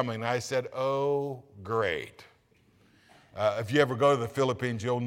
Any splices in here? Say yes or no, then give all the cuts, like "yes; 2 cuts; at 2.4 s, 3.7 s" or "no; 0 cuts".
no; 0 cuts